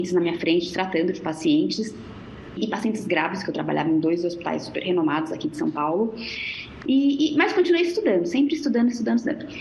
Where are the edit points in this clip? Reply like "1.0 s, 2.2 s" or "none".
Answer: 2.6 s, 6.8 s